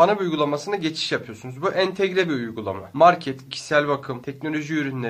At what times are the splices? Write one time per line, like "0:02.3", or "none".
0:03.5

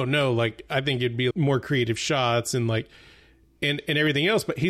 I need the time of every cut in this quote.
0:01.3

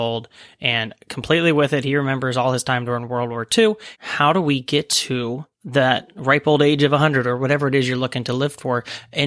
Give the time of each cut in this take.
0:03.9
0:05.5

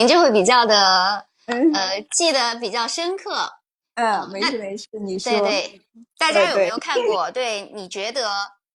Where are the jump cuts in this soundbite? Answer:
none

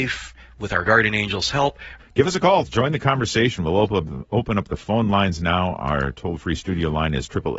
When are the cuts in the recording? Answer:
0:02.0

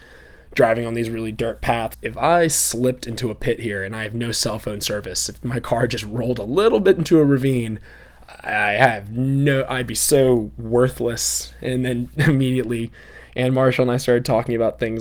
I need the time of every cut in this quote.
0:01.9

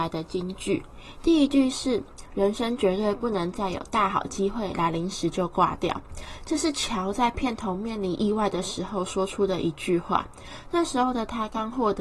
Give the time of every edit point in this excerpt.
none

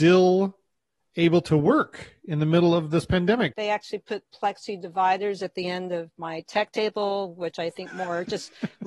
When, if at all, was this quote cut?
0:03.5

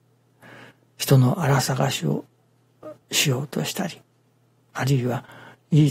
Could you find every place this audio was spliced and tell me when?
0:03.0

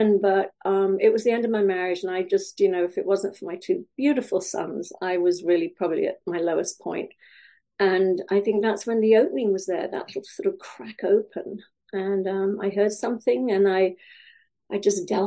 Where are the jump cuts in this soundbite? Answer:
none

